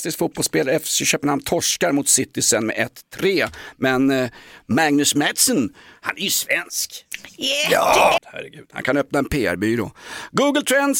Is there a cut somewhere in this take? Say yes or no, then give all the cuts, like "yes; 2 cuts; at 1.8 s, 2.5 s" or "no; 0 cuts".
yes; 1 cut; at 8.2 s